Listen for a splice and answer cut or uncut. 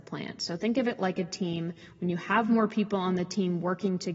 uncut